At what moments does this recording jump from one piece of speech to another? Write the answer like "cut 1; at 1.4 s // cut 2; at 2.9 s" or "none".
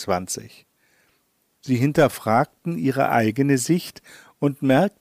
none